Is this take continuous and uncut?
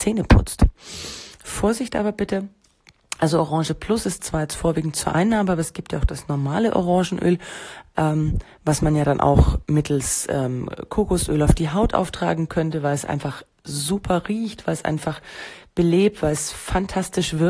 yes; 0 cuts

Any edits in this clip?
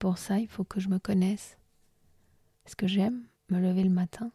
yes; 1 cut; at 2.5 s

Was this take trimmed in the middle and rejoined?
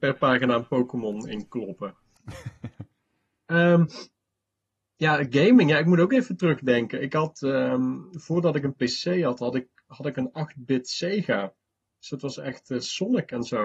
no; 0 cuts

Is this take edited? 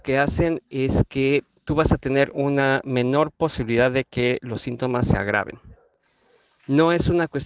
no; 0 cuts

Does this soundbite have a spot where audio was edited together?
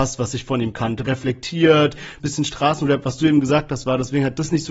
yes; 2 cuts; at 1.0 s, 2.2 s

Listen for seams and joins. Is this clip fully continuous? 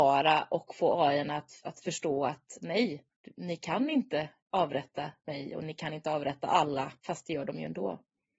no; 3 cuts; at 1.6 s, 3.2 s, 7.0 s

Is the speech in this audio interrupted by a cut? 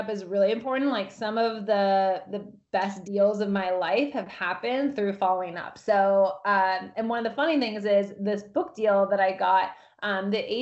no; 0 cuts

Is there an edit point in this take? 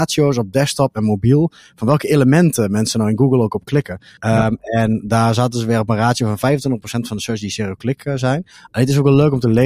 yes; 1 cut; at 4.2 s

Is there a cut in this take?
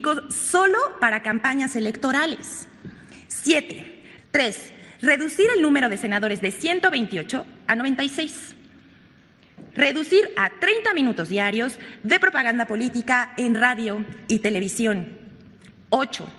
yes; 2 cuts; at 4.2 s, 9.7 s

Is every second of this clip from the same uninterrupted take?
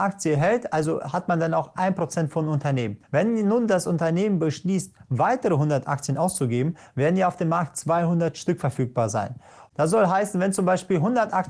no; 2 cuts; at 3.0 s, 9.7 s

